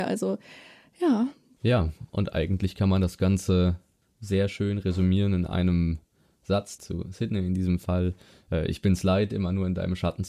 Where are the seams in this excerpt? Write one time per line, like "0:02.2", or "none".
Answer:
0:06.8